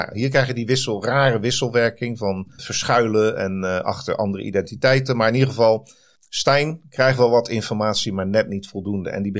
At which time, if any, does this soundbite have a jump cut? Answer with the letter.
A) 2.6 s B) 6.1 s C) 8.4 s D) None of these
A